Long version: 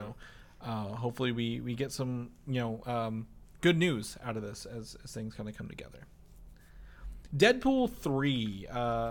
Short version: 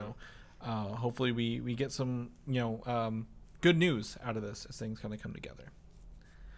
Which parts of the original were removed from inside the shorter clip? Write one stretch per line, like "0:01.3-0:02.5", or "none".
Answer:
0:04.6-0:05.0